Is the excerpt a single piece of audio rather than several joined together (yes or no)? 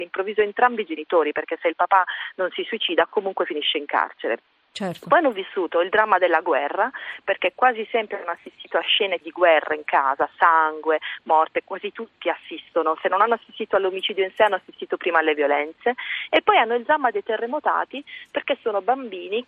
no